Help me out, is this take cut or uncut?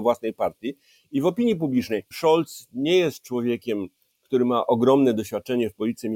cut